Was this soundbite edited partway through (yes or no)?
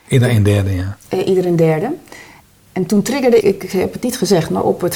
yes